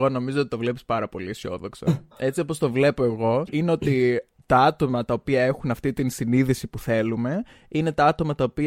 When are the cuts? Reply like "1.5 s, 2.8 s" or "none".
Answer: 2.1 s, 3.5 s